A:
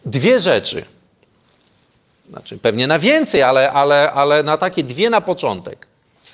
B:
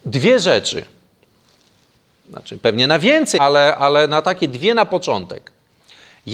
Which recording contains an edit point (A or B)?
B